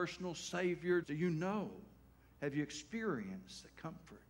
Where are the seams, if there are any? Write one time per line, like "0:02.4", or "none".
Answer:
0:01.0